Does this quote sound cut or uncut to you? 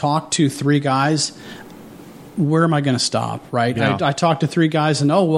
uncut